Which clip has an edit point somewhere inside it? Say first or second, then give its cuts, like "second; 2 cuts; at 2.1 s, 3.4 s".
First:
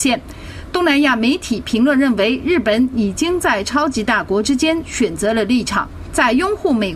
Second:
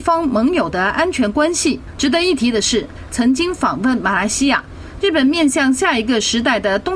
second; 3 cuts; at 2.0 s, 3.1 s, 5.0 s